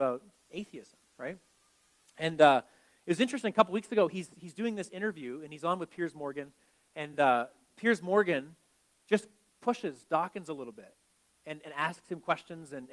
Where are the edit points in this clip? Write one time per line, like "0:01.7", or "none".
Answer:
none